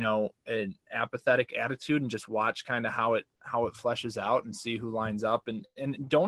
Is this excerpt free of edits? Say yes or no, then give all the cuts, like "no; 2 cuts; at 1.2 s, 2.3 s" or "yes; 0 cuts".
yes; 0 cuts